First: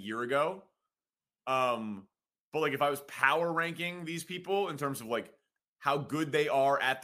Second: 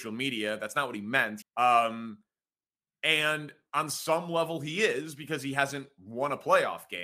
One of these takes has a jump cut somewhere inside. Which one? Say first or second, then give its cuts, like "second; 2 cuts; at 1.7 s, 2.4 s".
second; 1 cut; at 1.4 s